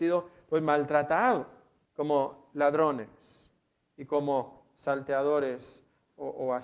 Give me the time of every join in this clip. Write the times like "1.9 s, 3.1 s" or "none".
1.8 s